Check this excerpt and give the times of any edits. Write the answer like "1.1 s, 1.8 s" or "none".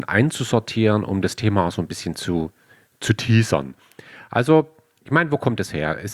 none

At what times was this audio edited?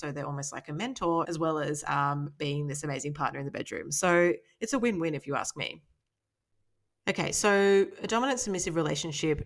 1.2 s

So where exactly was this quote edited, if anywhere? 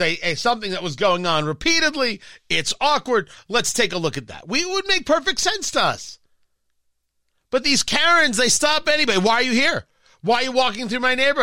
none

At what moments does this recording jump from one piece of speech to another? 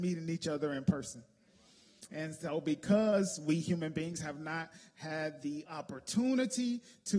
5.7 s

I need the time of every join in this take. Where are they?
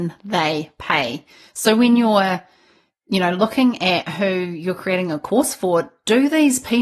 none

